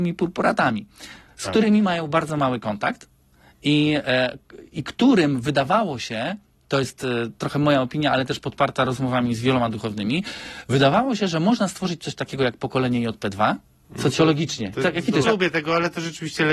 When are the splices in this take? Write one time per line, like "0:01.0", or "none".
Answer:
0:13.8
0:15.2